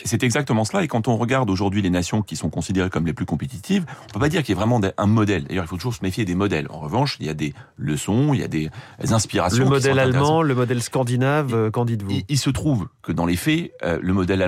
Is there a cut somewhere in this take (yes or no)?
no